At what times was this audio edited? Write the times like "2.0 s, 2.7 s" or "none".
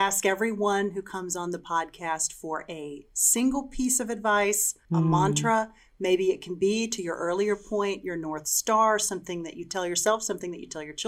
4.8 s